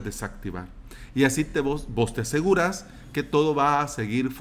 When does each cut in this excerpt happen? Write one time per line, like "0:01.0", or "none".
none